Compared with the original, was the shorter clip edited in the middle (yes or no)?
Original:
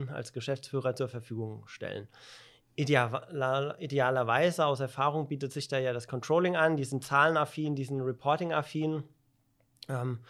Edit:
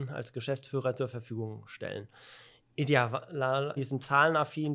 yes